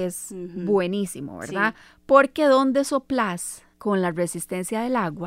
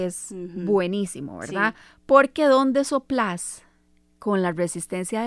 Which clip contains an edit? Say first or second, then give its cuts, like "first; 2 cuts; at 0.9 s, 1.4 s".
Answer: first; 1 cut; at 3.7 s